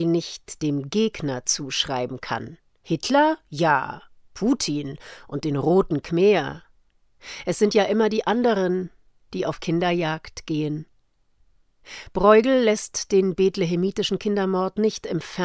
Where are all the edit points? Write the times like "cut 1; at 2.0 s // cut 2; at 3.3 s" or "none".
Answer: none